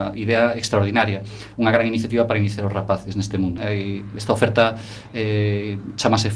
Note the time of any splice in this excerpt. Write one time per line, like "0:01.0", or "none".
0:03.6